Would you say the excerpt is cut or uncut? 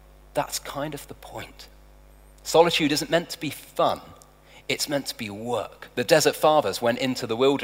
uncut